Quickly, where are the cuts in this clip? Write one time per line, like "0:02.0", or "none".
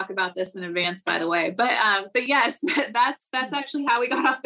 none